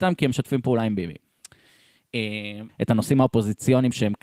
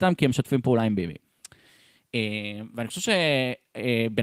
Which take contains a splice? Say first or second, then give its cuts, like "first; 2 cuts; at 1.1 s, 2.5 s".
first; 1 cut; at 2.7 s